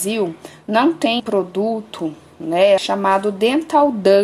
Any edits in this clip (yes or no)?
yes